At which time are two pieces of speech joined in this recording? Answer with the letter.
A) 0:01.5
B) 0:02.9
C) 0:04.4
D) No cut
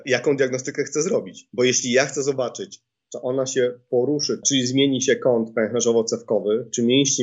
C